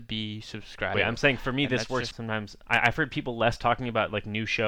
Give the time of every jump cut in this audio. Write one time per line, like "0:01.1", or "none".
0:00.9
0:02.1